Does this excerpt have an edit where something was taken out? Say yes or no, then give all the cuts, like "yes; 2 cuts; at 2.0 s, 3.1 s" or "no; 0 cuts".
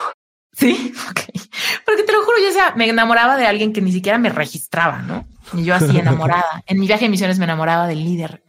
no; 0 cuts